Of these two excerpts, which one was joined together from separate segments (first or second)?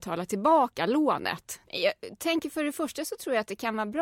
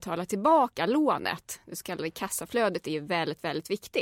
first